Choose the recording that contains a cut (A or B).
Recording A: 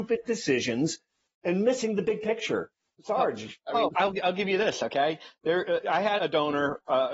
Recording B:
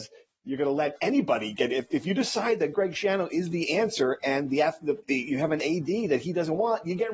A